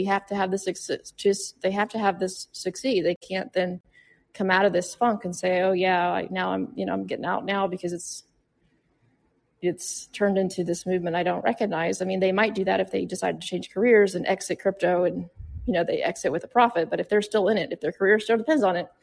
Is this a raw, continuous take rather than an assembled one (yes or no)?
yes